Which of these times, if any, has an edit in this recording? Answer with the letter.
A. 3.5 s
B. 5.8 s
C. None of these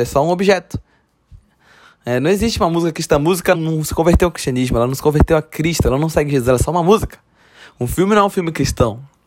A